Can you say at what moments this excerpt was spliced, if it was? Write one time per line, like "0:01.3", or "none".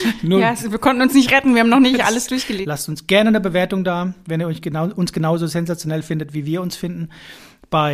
0:02.6